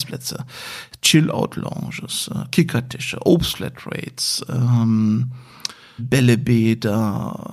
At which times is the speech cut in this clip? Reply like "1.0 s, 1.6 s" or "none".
6.0 s